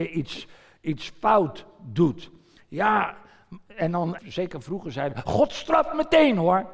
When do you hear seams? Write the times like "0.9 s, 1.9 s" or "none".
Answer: 4.2 s

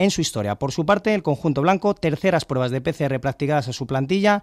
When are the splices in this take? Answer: none

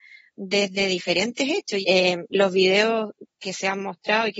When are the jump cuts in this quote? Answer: 1.8 s

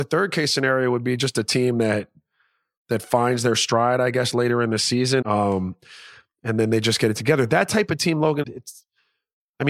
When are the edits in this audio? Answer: 5.2 s, 8.4 s

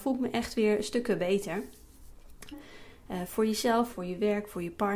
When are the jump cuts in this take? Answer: 2.5 s, 3.9 s

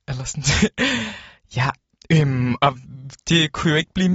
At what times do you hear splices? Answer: none

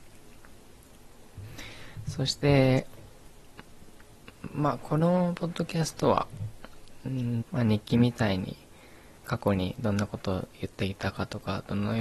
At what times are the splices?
7.4 s, 9.2 s

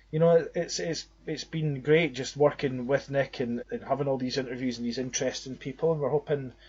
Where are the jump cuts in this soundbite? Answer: 3.6 s

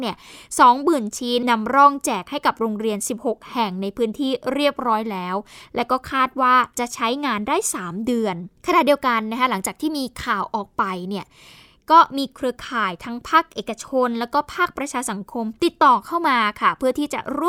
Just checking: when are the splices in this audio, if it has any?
1.4 s, 8.6 s

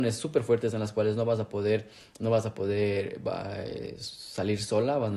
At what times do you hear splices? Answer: none

